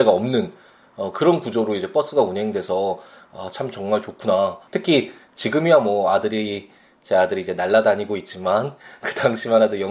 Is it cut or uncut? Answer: cut